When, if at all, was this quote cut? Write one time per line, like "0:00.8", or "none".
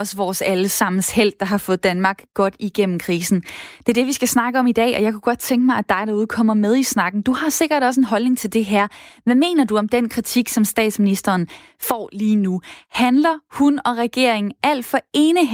none